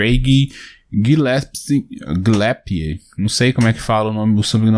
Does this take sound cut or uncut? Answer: uncut